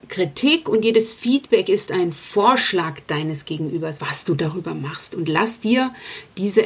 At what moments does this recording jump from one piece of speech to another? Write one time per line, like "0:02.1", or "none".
0:04.0